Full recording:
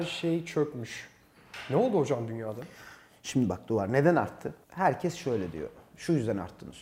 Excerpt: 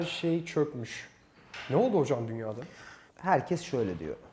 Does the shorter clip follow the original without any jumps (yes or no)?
no